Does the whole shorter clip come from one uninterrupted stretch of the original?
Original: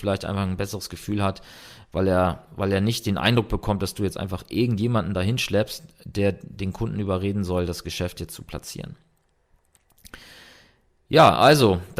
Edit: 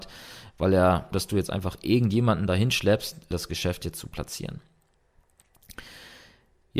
no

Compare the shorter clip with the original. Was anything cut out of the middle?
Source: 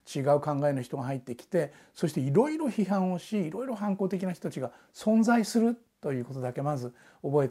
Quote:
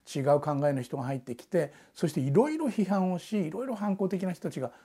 no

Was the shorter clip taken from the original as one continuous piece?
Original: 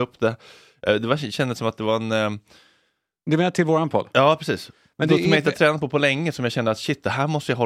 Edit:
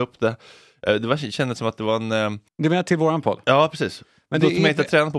no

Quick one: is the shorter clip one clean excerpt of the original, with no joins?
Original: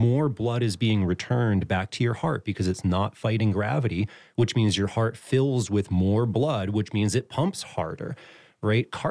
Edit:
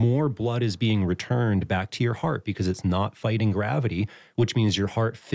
yes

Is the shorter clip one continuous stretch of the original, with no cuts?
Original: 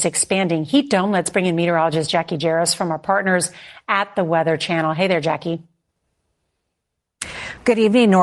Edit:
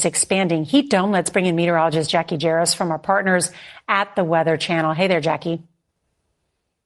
yes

